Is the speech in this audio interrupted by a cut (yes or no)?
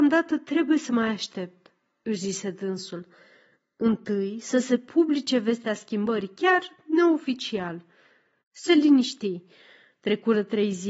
yes